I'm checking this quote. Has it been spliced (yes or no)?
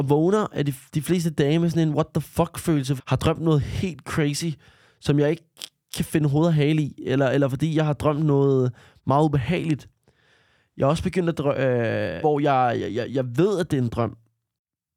yes